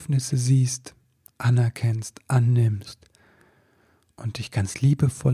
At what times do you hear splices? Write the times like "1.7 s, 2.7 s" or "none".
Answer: none